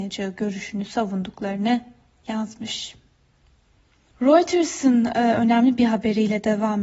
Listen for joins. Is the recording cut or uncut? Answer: uncut